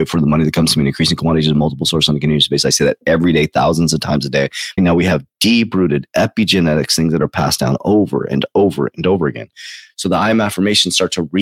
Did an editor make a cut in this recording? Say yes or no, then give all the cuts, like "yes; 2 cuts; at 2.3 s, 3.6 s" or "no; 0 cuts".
yes; 1 cut; at 4.8 s